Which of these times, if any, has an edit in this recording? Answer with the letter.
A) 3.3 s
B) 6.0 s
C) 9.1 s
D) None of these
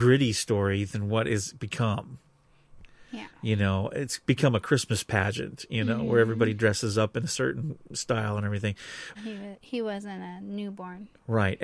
C